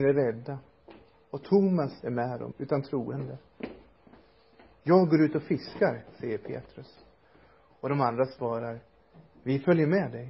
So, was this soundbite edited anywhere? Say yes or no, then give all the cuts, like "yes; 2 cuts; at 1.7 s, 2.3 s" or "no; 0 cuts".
yes; 1 cut; at 2.5 s